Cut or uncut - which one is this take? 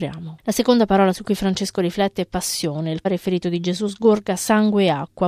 cut